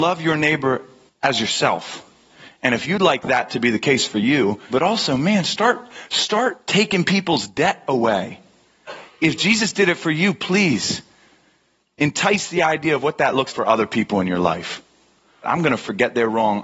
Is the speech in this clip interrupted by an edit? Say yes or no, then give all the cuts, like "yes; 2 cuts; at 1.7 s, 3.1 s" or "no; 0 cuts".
yes; 3 cuts; at 4.7 s, 13.5 s, 15.4 s